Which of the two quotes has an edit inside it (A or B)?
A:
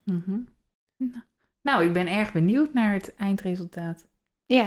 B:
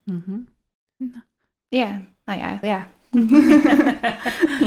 B